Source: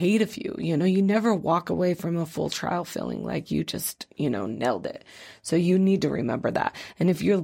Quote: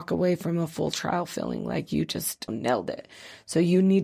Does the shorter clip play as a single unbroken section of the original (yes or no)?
no